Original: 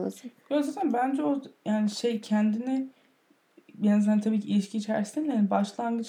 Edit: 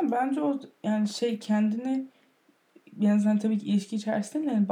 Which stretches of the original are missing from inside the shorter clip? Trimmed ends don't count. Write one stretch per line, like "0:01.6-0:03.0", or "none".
none

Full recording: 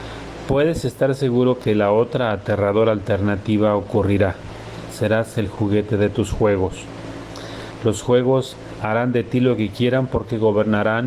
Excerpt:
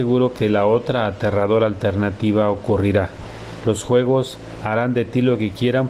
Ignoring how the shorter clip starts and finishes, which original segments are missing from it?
0:04.9-0:07.8

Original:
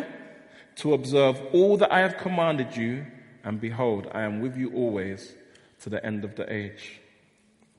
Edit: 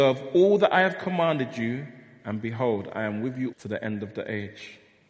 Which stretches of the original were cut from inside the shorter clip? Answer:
0:04.7-0:05.7

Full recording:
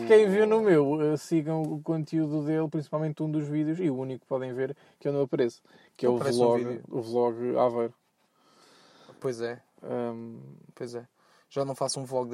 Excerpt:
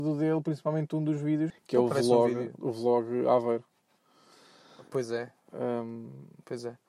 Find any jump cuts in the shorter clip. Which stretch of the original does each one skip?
0:03.8-0:05.8

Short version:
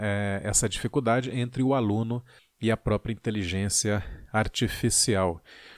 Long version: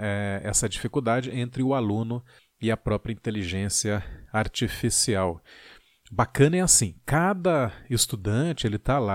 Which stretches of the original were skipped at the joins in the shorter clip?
none

